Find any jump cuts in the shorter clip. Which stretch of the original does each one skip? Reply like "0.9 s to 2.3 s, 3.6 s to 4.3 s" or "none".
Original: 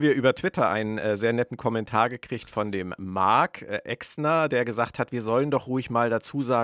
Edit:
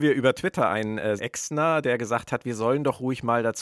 1.2 s to 3.8 s